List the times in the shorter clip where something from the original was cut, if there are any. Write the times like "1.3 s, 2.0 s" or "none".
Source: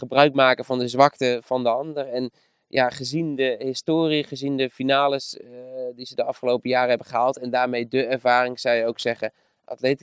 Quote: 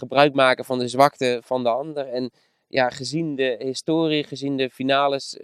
none